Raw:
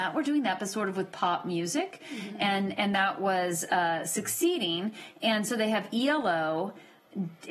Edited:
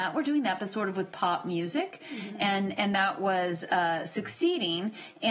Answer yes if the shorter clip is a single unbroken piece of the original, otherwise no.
yes